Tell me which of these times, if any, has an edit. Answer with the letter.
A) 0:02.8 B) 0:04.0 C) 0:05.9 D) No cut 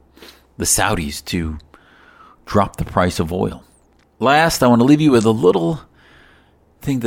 B